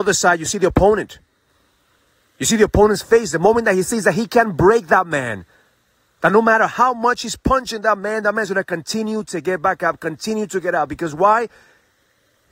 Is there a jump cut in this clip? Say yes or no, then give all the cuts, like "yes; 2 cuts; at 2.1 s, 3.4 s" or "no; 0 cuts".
no; 0 cuts